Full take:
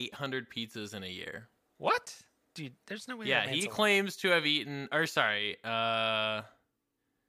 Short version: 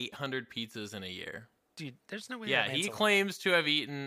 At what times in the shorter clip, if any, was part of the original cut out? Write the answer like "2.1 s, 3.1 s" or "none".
1.7 s

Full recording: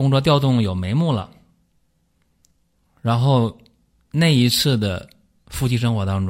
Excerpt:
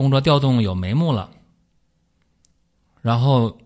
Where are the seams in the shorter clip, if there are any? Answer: none

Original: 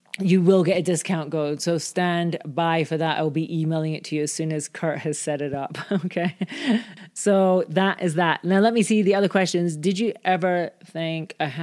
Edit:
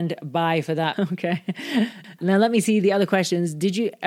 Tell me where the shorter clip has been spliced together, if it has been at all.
0.9 s, 2.2 s

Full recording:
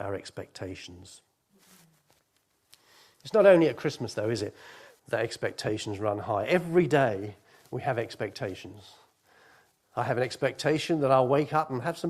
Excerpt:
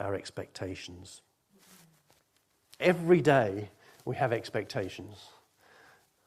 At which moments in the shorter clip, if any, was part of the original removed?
2.8 s

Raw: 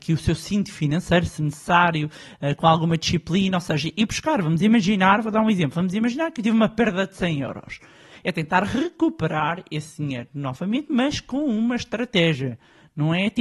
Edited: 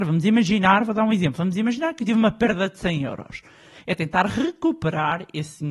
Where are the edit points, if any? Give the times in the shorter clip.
none

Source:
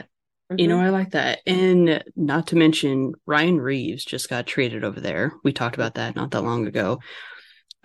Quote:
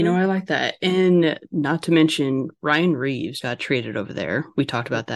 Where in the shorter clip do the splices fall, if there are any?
3.4 s

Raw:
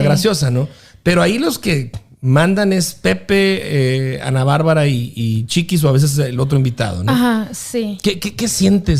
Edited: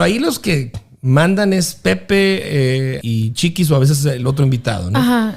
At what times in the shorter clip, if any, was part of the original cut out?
3.0 s

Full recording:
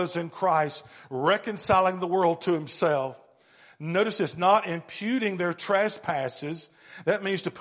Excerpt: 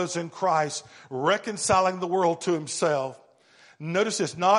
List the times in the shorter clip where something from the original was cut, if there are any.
none

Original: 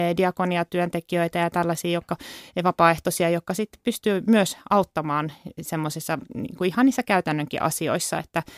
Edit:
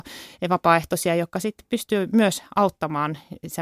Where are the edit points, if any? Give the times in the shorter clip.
none

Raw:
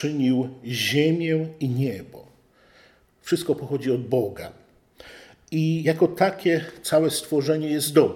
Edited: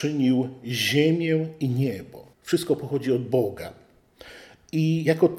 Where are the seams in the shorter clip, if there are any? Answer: 2.3 s

